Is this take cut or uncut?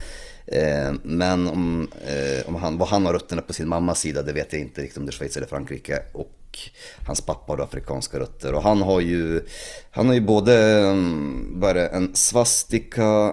uncut